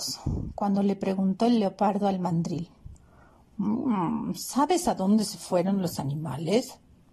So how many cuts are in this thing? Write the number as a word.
zero